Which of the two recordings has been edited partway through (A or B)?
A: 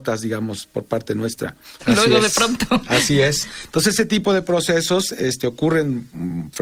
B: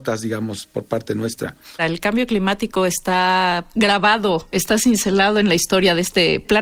A